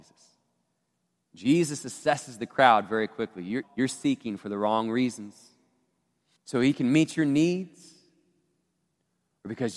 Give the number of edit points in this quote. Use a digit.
2